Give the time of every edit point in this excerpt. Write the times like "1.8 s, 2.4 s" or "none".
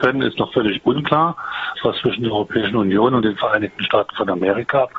1.8 s